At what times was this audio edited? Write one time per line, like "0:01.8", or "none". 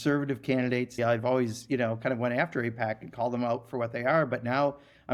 0:01.0